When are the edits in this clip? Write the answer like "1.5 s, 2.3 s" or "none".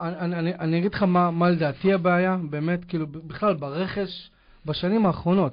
none